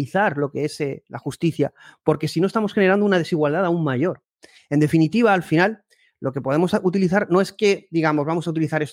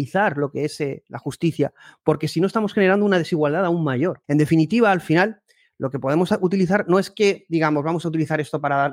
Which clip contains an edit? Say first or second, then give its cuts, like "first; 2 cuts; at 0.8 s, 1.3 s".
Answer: second; 1 cut; at 4.2 s